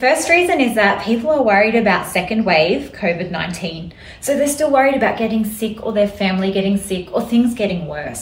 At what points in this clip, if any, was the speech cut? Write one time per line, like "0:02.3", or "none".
none

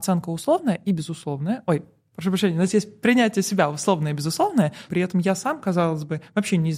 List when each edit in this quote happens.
0:04.9

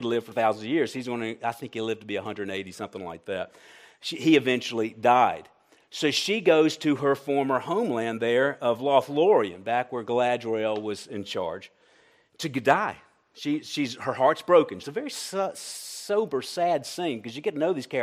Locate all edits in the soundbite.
0:14.8

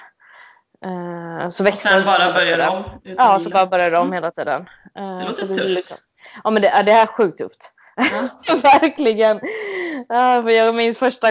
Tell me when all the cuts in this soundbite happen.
none

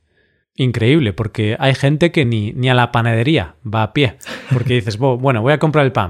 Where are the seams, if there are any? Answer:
none

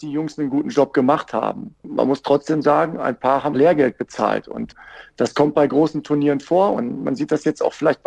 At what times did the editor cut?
0:03.5
0:06.7

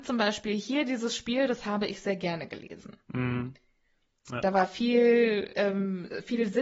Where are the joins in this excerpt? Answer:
none

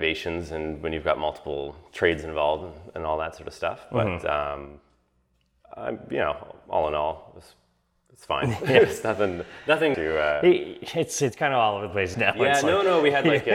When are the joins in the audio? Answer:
0:09.9
0:12.1

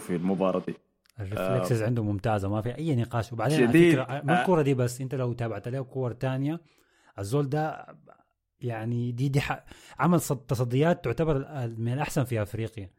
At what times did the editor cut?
none

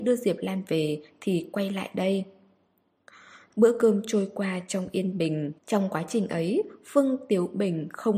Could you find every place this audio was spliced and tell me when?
0:03.5
0:05.6

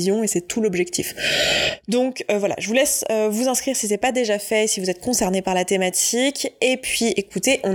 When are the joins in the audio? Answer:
none

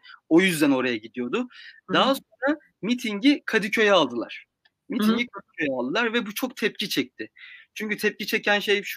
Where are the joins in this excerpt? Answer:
none

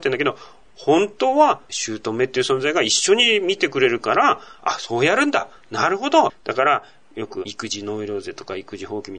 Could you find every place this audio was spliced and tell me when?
0:06.3

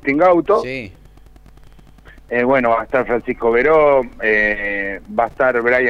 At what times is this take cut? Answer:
none

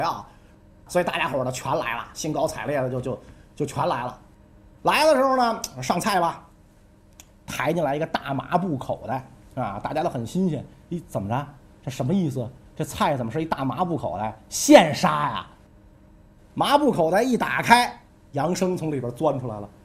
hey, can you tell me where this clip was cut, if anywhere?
none

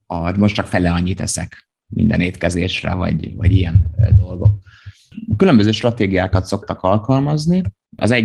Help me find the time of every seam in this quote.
none

